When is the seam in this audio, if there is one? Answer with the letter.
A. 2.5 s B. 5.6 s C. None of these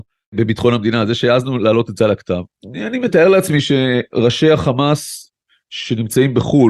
A